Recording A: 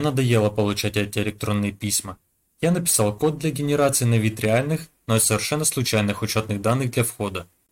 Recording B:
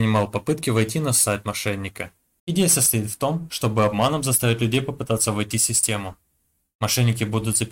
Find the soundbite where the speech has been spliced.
B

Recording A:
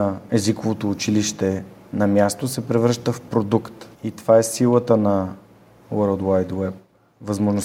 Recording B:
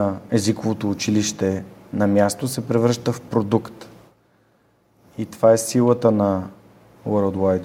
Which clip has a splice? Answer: A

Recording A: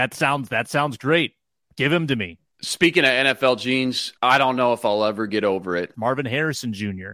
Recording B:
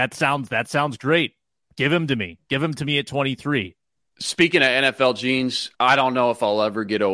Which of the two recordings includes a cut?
A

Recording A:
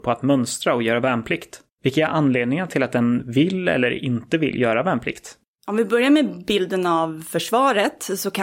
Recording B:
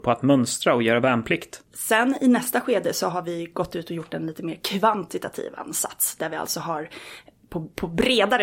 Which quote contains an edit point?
B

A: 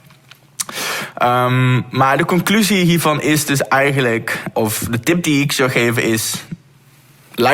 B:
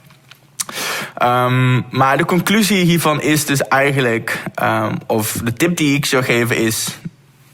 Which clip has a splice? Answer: A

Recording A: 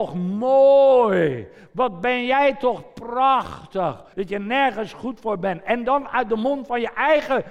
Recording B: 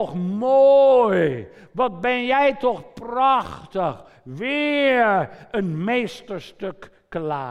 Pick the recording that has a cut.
A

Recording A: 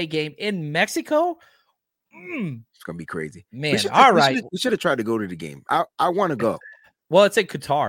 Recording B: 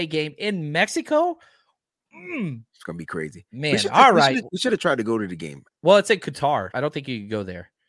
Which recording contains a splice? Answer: B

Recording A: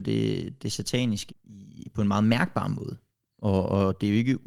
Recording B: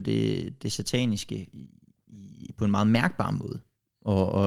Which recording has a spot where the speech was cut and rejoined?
A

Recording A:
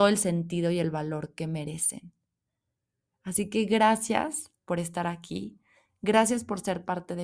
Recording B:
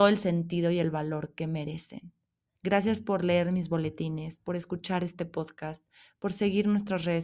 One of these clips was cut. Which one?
B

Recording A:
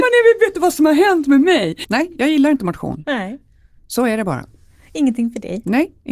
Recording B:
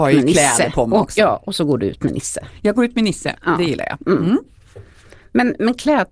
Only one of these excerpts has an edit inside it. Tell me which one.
A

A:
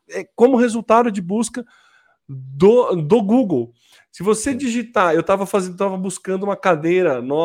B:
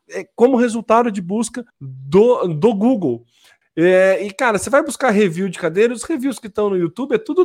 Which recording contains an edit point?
B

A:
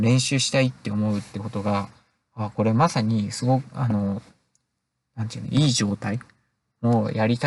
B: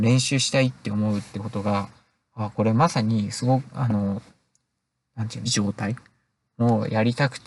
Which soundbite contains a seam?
B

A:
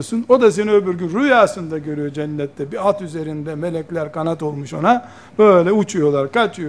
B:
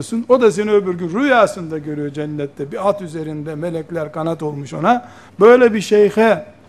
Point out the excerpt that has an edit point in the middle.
B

